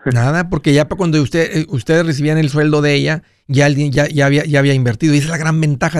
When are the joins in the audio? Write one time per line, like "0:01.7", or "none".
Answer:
none